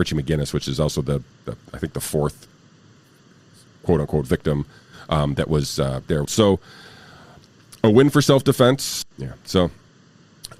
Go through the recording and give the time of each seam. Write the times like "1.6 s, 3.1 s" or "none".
1.3 s, 6.2 s, 9.0 s